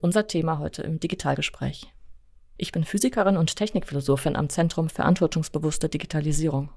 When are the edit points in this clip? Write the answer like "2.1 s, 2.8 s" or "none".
2.6 s